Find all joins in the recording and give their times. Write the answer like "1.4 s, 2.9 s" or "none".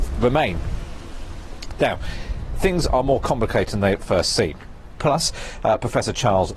5.0 s